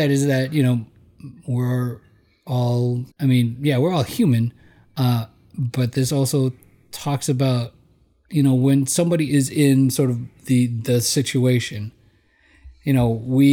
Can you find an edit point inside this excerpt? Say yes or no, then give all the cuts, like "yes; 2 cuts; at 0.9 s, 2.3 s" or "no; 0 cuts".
yes; 1 cut; at 3.1 s